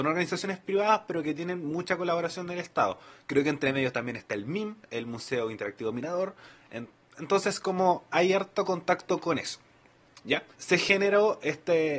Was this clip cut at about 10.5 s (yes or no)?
yes